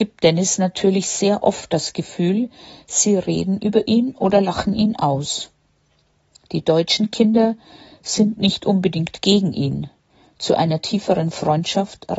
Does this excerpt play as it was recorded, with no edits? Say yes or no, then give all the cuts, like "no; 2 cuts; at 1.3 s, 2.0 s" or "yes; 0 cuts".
yes; 0 cuts